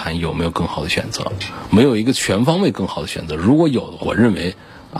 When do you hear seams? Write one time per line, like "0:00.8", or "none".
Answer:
0:04.0